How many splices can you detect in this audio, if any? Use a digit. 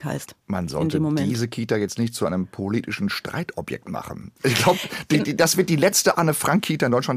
1